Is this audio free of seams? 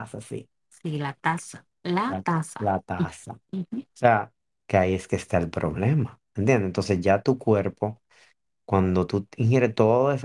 yes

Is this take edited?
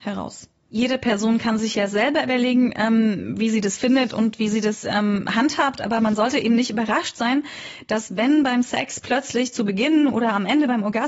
no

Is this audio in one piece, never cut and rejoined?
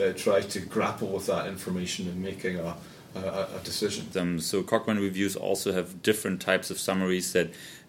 no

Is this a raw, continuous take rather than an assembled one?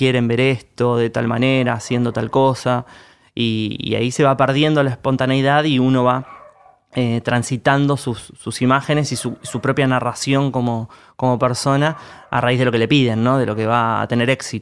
yes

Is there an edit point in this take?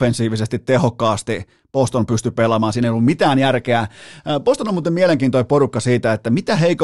no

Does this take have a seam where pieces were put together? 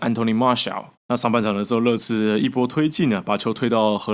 yes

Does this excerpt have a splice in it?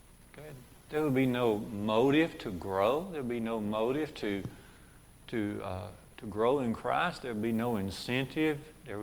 no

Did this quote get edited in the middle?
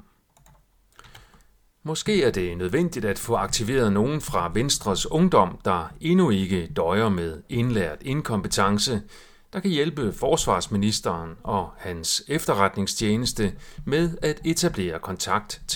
no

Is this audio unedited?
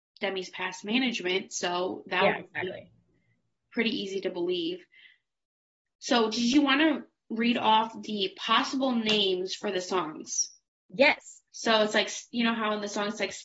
no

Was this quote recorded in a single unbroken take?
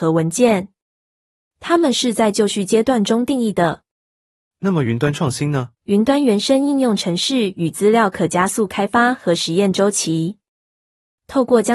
no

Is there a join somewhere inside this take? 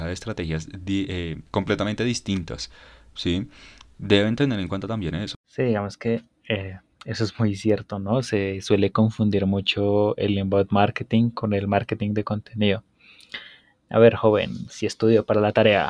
yes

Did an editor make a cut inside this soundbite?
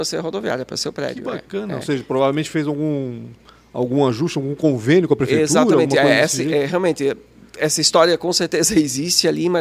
no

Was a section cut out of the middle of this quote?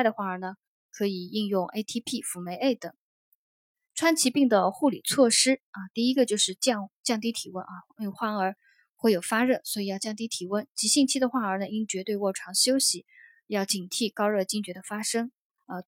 no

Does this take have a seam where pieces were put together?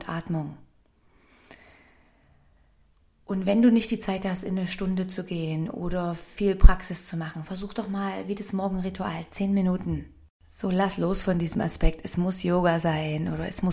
yes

